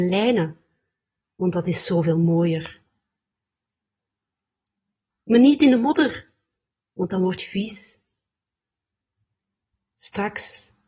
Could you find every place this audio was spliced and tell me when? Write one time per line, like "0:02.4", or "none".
0:05.1